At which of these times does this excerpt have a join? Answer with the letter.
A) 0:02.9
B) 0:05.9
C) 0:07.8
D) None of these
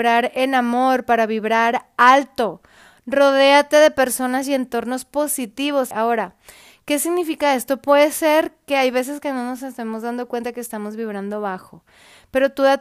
B